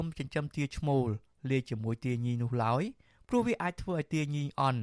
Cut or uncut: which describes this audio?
uncut